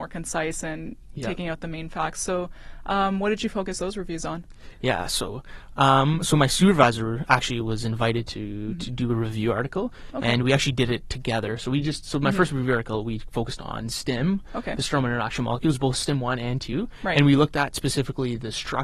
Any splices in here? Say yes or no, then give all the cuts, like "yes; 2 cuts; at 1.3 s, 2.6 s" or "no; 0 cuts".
no; 0 cuts